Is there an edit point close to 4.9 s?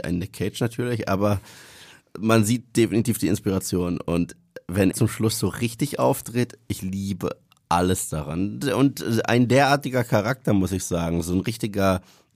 yes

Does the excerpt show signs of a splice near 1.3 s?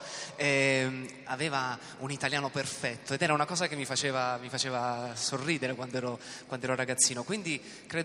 yes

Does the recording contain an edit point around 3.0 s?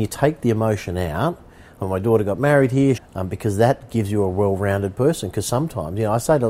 yes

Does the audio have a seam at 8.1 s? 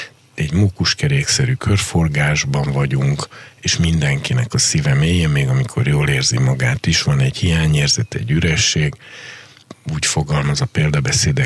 no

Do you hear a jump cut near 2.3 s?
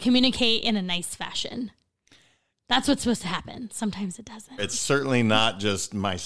no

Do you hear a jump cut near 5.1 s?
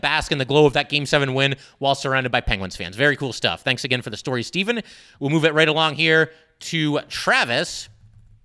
no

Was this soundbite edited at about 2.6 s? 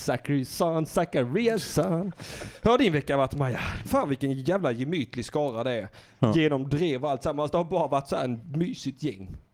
no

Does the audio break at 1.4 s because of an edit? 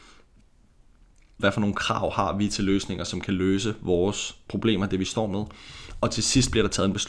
yes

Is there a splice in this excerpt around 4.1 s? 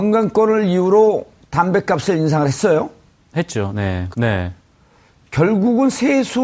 yes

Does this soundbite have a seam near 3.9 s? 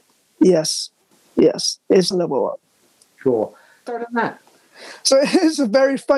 yes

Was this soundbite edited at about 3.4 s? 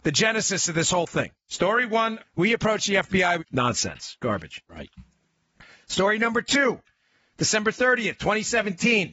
yes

